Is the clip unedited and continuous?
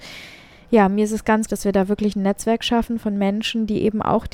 no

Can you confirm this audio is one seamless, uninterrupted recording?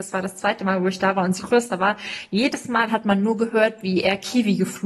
no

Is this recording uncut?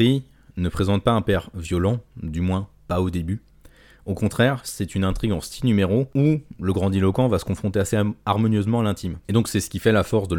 yes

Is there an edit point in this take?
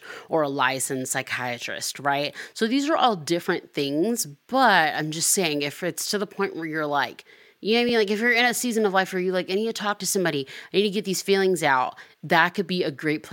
no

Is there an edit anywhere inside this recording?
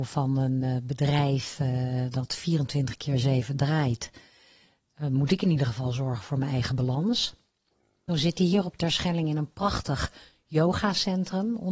yes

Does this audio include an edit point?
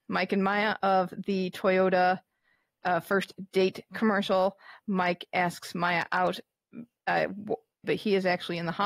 yes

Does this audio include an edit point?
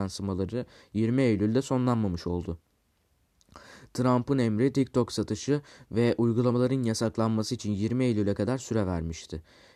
no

